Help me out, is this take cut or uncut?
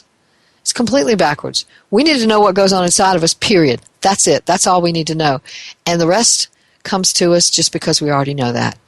uncut